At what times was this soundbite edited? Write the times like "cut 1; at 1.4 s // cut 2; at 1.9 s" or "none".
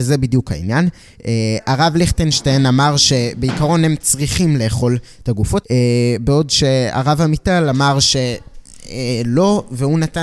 cut 1; at 5.6 s